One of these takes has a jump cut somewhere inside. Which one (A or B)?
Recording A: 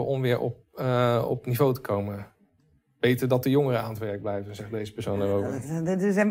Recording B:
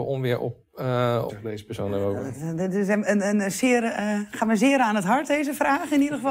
B